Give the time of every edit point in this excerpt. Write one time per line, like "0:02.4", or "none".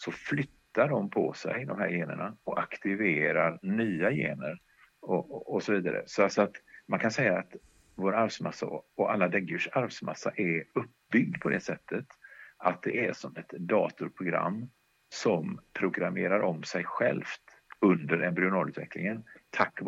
none